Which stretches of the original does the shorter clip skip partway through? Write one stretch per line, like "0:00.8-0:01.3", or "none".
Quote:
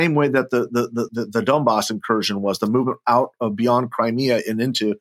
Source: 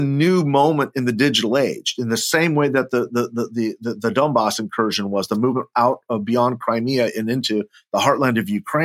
0:03.5-0:03.8